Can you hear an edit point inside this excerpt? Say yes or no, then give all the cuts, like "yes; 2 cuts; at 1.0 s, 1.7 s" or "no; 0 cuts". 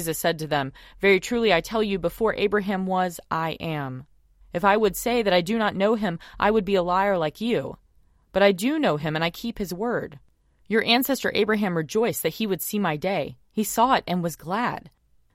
yes; 1 cut; at 4.4 s